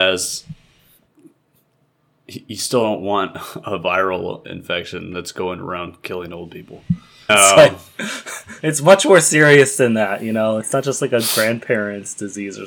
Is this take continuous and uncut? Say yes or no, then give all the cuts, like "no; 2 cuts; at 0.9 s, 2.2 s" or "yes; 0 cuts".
no; 1 cut; at 7.3 s